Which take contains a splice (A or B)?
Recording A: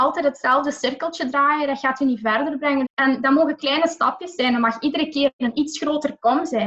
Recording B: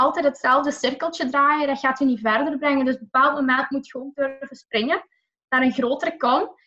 A